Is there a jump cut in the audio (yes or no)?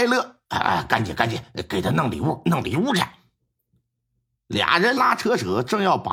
yes